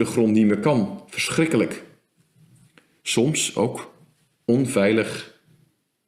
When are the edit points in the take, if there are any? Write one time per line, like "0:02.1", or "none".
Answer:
0:03.0

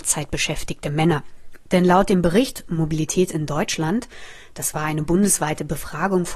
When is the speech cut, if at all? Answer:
0:01.7

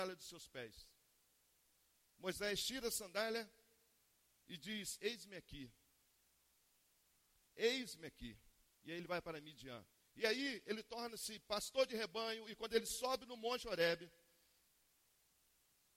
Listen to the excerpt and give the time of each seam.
0:08.7
0:10.0

